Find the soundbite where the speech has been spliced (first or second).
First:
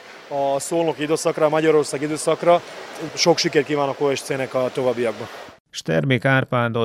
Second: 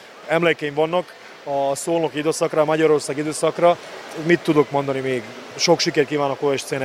first